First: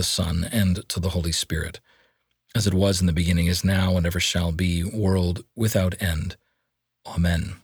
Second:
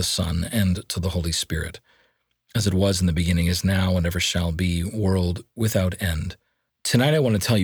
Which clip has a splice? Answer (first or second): second